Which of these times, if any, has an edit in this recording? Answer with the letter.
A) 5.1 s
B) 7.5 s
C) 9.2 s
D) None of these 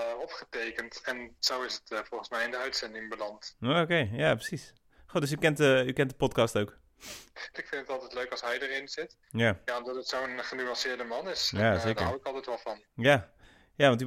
B